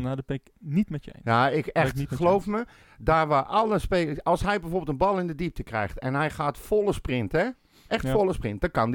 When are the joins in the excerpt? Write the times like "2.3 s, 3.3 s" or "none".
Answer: 2.8 s